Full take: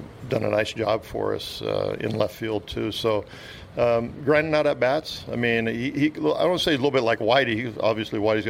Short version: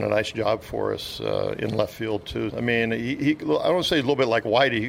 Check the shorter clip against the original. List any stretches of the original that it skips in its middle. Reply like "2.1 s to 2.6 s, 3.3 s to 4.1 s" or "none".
2.9 s to 5.3 s

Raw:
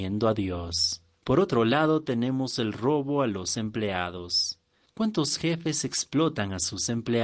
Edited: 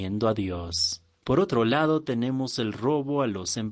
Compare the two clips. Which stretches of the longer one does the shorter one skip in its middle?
none

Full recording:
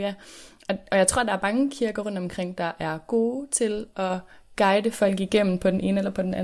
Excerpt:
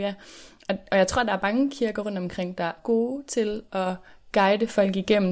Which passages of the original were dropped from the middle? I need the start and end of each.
2.8 s to 3.0 s

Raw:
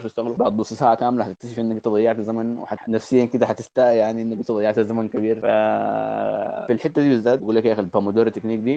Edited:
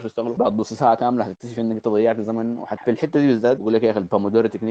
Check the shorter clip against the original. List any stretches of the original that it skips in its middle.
2.8 s to 6.7 s

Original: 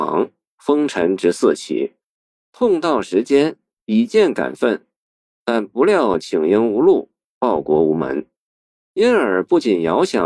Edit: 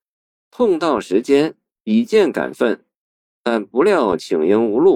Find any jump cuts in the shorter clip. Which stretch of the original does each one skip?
none

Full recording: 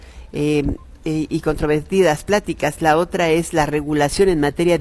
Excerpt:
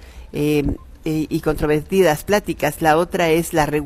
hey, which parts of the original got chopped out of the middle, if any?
none

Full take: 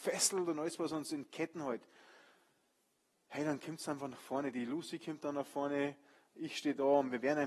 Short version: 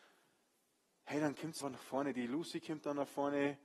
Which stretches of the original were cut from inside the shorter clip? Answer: 3.8 s to 4.0 s

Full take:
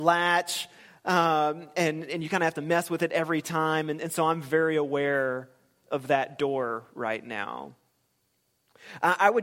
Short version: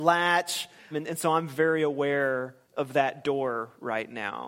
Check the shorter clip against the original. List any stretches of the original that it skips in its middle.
0.9 s to 3.8 s, 5.6 s to 5.8 s

